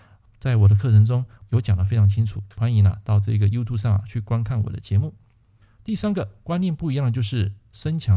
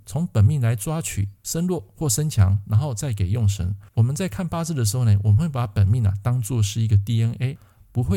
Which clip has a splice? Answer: second; 1 cut; at 3.9 s

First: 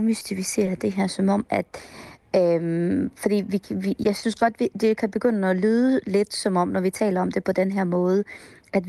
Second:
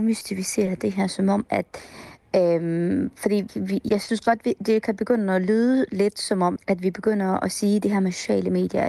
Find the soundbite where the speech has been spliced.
second; 2 cuts; at 3.5 s, 6.6 s

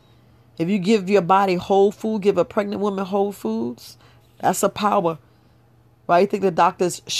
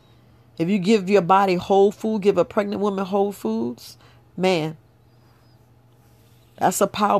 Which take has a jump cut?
first; 1 cut; at 4.2 s

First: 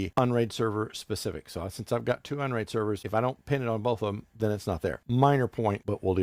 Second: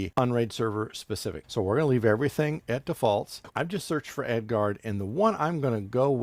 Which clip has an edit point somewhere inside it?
second; 2 cuts; at 1.4 s, 3.5 s

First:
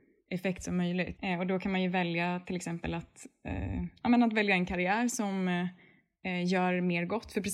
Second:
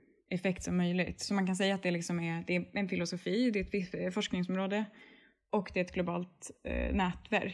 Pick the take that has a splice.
first; 1 cut; at 1.2 s

